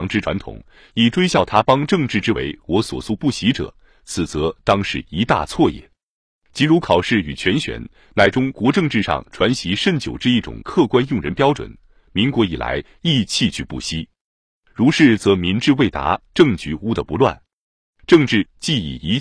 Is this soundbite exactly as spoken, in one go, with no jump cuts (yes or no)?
no